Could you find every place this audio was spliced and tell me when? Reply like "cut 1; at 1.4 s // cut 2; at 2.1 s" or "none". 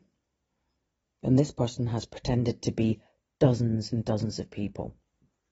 none